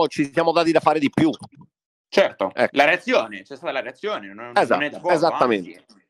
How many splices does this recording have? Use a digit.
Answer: 0